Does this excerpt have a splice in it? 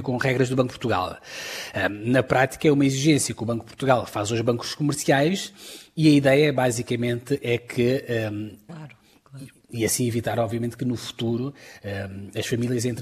yes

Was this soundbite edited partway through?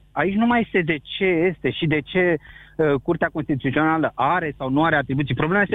no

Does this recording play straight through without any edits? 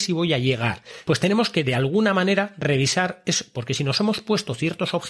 no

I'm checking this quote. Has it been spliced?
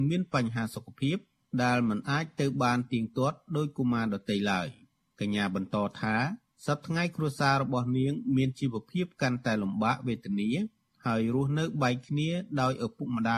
no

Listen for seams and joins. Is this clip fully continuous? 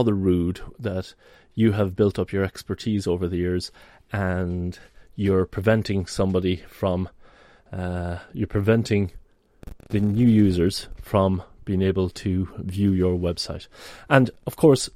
yes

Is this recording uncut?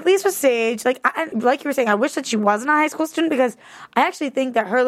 no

